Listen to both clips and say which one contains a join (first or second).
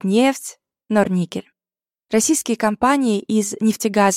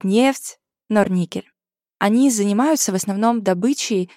second